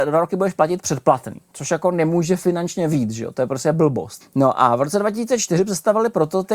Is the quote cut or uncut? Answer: cut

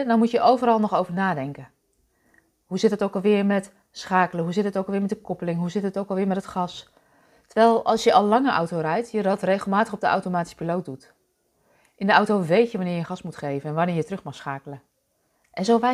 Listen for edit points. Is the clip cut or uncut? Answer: uncut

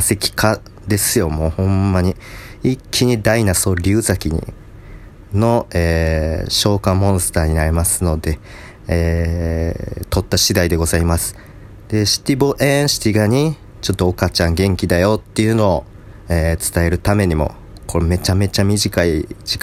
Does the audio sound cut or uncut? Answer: uncut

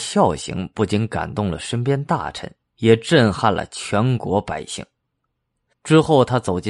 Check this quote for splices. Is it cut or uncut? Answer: cut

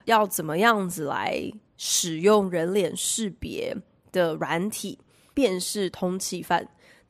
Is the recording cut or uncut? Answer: cut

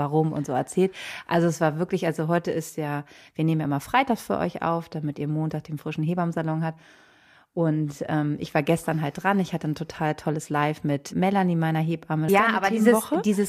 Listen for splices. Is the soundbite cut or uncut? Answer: cut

